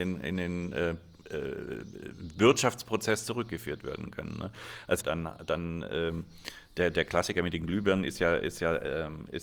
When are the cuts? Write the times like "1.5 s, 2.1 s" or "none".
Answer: 5.0 s